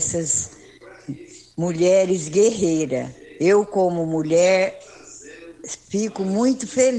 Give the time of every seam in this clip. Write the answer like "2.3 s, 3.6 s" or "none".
none